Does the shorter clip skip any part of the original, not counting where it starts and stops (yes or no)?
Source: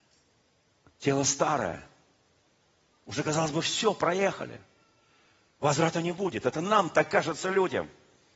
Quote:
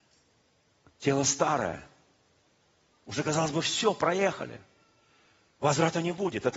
no